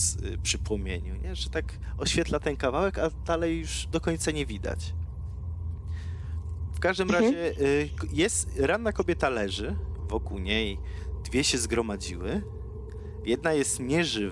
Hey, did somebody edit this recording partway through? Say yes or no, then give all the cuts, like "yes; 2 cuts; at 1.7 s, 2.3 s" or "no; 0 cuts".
no; 0 cuts